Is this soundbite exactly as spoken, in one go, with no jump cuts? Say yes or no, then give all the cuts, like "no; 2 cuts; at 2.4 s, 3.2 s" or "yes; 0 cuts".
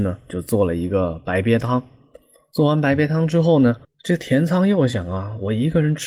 yes; 0 cuts